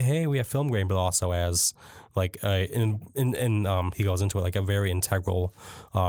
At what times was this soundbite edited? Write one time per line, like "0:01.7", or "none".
none